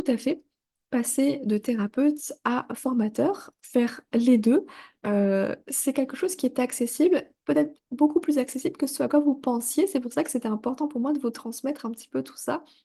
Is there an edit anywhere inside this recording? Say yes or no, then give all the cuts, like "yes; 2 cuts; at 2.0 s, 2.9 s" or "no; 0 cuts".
no; 0 cuts